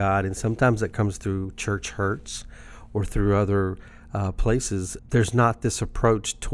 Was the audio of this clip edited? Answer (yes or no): yes